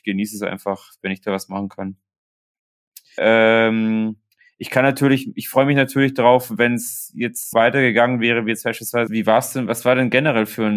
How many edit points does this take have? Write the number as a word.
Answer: three